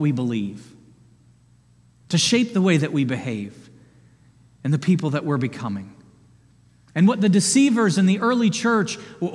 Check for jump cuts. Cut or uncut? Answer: uncut